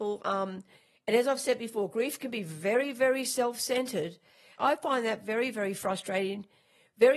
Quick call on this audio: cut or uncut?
cut